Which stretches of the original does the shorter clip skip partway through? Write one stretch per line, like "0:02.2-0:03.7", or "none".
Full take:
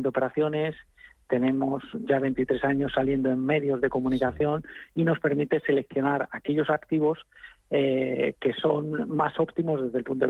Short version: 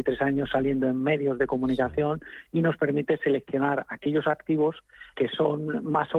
0:07.5-0:08.4